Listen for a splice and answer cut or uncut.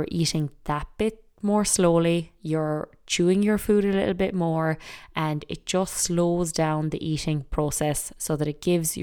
uncut